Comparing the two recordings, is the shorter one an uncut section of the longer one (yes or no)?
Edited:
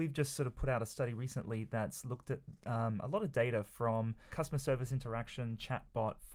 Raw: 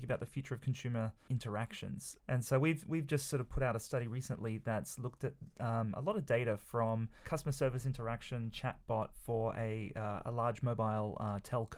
yes